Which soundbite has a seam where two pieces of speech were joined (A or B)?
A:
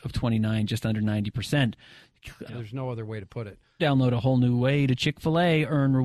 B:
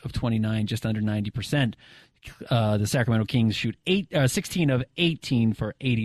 A